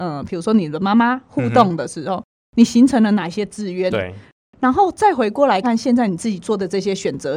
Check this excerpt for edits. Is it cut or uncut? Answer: cut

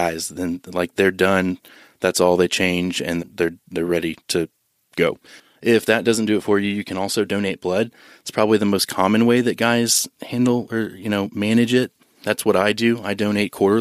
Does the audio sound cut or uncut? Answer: cut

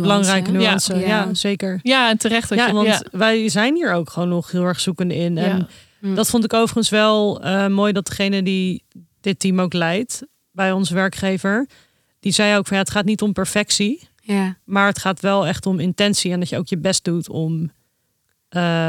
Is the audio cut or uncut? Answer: cut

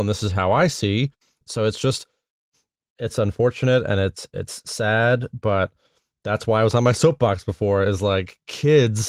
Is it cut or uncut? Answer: cut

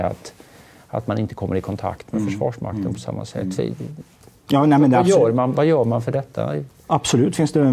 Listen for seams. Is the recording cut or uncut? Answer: uncut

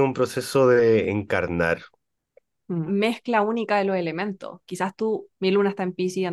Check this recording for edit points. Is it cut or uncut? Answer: cut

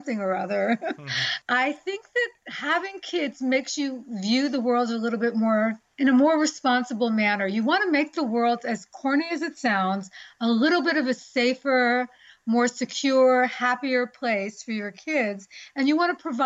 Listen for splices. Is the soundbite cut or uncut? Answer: uncut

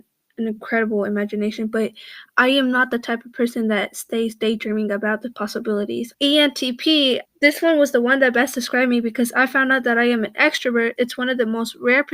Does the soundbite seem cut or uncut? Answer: cut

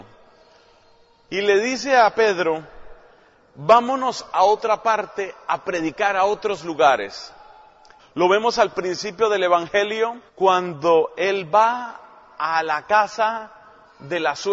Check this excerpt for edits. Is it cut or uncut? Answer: cut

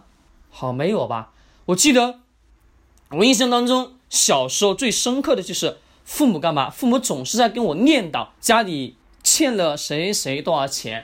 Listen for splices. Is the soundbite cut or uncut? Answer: cut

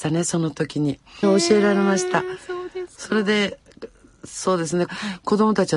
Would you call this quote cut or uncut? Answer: cut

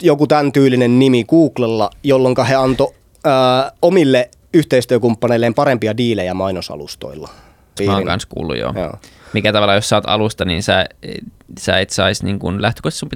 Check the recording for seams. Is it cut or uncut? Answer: cut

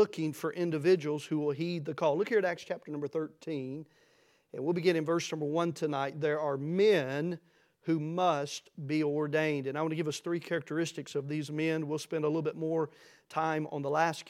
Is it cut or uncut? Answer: uncut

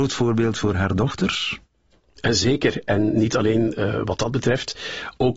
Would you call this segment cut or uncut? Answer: uncut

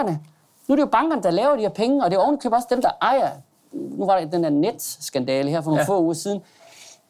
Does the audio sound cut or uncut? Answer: uncut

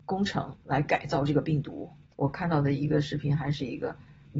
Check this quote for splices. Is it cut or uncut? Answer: cut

